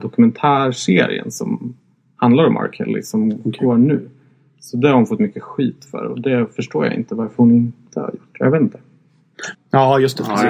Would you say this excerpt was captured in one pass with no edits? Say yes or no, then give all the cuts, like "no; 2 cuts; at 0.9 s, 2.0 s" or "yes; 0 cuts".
no; 1 cut; at 9.5 s